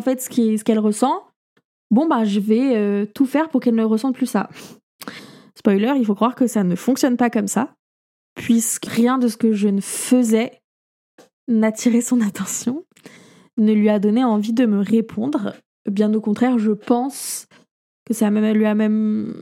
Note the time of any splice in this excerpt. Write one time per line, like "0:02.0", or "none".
0:08.9